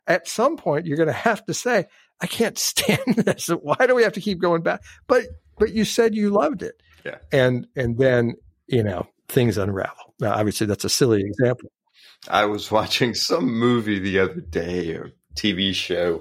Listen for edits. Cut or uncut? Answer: uncut